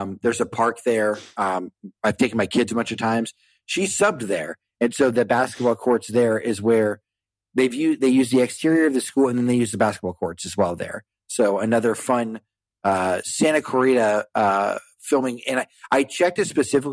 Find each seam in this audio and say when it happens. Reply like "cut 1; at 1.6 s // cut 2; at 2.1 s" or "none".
none